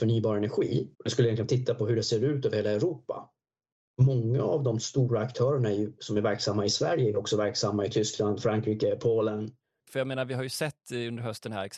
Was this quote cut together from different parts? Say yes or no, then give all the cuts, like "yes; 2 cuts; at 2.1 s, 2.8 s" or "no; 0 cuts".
yes; 2 cuts; at 0.9 s, 9.9 s